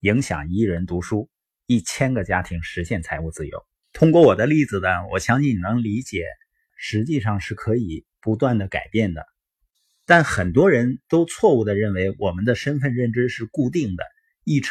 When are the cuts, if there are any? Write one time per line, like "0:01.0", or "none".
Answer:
0:03.8
0:06.7